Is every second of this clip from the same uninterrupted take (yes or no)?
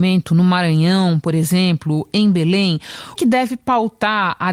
no